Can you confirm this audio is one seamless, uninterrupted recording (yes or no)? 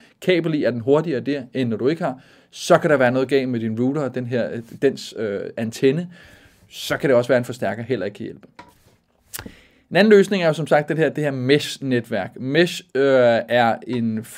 yes